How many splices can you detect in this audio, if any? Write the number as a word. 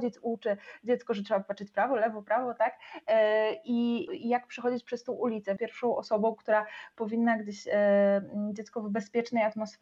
two